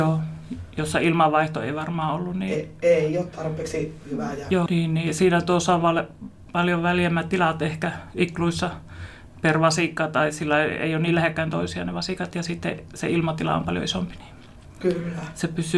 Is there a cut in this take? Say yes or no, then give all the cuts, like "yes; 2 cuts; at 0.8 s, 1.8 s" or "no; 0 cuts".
yes; 1 cut; at 4.7 s